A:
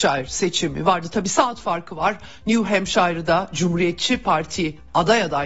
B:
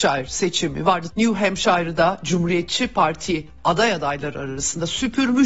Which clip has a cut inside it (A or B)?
B